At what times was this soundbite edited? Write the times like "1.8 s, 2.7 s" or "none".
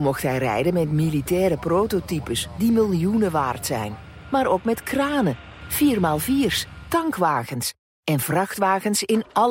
none